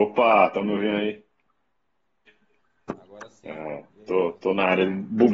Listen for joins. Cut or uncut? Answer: uncut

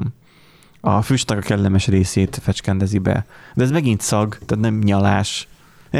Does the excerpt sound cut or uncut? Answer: uncut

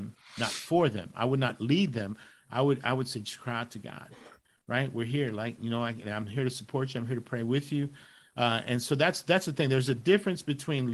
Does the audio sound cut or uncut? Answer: uncut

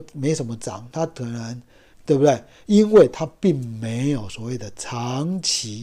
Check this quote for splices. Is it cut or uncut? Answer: cut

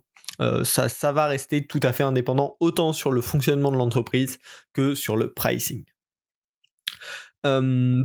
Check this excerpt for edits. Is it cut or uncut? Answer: uncut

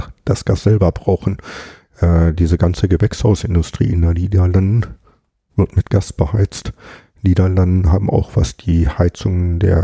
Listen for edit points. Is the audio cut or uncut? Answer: uncut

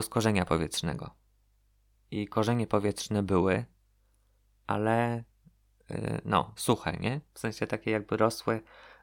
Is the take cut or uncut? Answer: cut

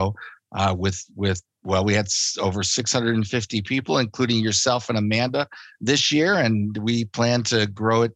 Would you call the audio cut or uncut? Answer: uncut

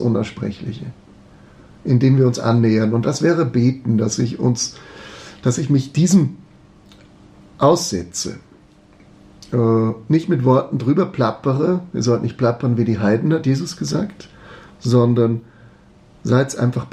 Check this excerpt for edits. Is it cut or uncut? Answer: uncut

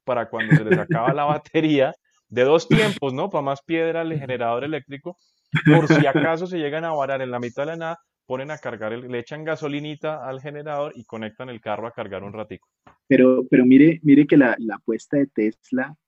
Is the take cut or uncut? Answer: uncut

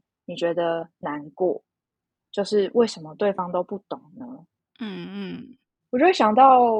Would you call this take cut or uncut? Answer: uncut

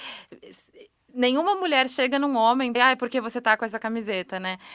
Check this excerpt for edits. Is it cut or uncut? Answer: cut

